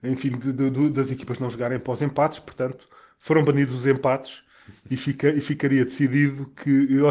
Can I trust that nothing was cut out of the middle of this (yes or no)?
yes